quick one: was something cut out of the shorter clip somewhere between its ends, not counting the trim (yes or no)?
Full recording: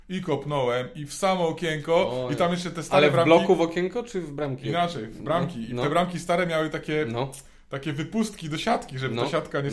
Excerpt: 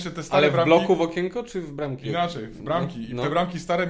no